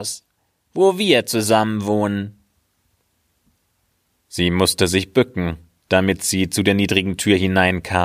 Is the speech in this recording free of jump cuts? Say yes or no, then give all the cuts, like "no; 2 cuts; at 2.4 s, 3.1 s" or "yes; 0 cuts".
yes; 0 cuts